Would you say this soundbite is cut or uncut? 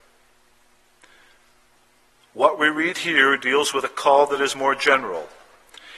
cut